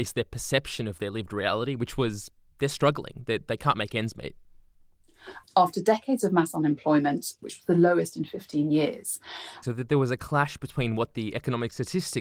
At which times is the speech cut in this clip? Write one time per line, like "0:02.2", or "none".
0:05.4
0:07.4
0:09.6